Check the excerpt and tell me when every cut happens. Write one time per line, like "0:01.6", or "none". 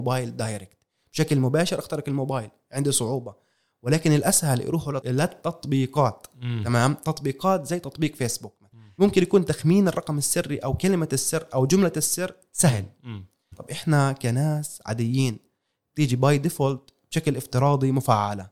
0:09.0
0:13.5